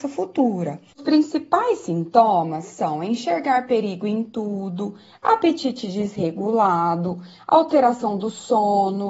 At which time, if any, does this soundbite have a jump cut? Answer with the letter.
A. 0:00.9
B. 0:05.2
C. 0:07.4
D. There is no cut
A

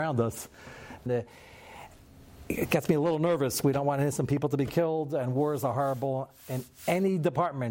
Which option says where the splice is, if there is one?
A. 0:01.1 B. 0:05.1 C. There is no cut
A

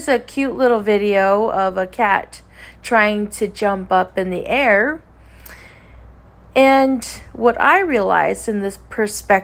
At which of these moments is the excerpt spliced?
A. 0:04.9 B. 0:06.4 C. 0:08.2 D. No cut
D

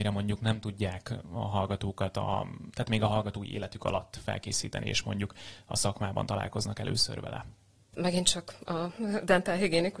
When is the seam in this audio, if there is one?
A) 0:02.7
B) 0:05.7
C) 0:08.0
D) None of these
C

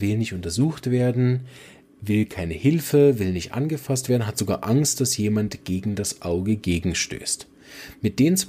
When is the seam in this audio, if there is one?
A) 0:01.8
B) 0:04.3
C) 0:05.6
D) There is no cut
D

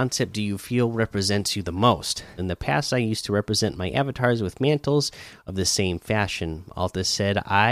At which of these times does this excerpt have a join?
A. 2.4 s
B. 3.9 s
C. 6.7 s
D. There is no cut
A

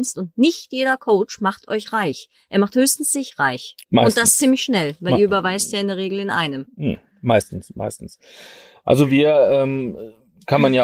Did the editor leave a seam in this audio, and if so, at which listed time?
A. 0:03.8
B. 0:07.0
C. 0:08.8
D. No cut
A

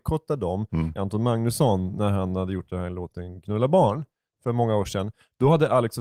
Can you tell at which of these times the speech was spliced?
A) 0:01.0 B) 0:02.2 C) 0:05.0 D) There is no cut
A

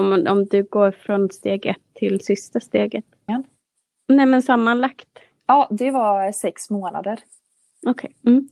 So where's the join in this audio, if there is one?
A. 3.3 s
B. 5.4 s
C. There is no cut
A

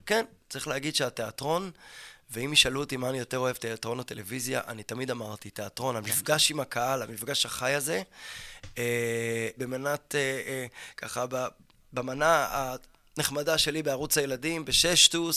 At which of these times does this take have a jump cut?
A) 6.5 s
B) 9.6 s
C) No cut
B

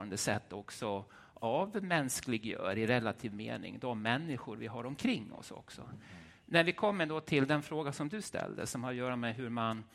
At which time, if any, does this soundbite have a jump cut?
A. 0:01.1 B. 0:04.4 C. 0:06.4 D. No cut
C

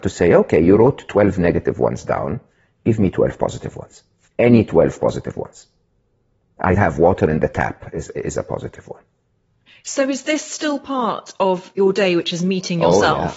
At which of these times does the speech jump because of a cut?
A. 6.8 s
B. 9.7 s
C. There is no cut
A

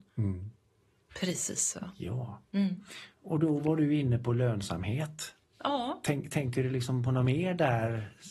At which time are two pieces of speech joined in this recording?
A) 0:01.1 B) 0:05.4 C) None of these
A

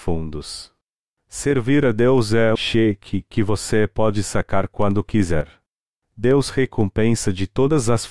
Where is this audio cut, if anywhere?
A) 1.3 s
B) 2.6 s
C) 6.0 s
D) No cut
B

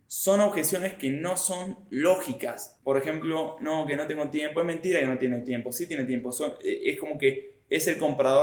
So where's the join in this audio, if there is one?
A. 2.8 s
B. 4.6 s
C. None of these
C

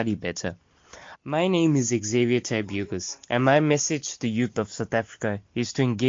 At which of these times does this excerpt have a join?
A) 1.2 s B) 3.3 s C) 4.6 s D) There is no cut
A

